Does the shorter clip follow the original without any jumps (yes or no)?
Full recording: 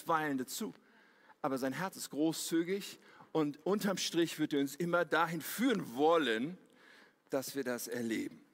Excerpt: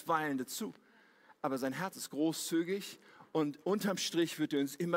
yes